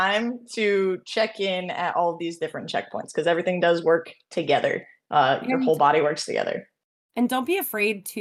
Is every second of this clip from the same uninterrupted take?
yes; 0 cuts

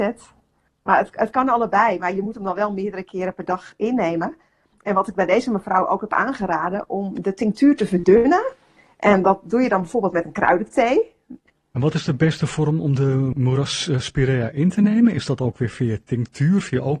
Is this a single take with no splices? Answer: no; 1 cut; at 11.5 s

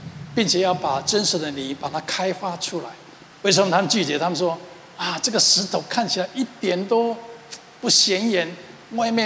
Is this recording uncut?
no; 1 cut; at 3.3 s

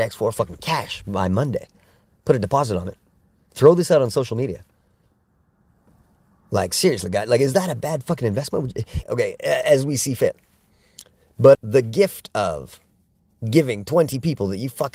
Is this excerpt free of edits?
no; 2 cuts; at 9.0 s, 11.5 s

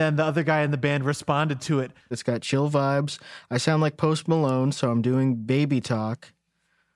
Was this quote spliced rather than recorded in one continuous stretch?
yes; 1 cut; at 2.1 s

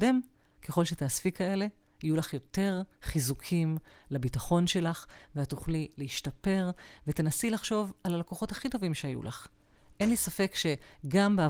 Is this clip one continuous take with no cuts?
yes; 0 cuts

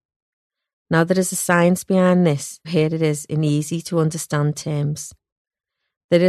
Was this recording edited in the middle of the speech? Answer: yes; 1 cut; at 2.6 s

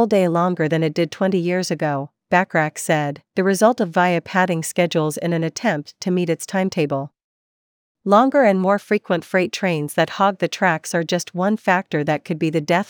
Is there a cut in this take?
no; 0 cuts

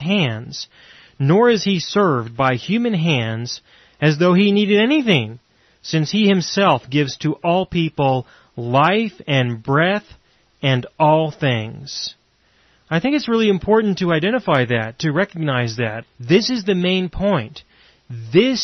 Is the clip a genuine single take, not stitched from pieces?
no; 1 cut; at 16.0 s

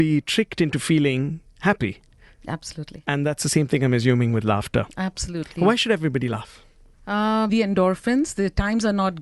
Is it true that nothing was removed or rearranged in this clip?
no; 1 cut; at 7.5 s

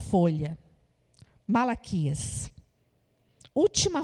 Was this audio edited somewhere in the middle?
no; 0 cuts

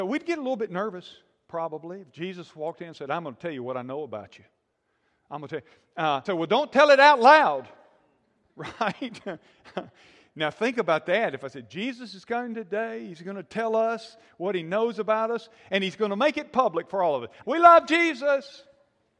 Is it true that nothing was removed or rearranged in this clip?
no; 2 cuts; at 6.3 s, 17.4 s

